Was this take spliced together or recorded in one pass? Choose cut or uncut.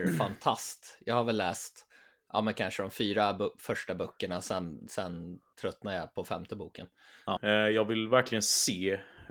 cut